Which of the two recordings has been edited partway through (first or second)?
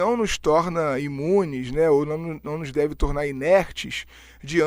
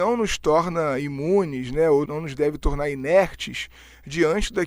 second